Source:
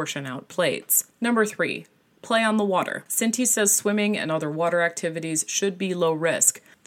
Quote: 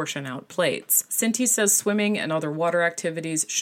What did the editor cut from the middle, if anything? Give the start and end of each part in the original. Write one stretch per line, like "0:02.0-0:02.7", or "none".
0:01.1-0:03.1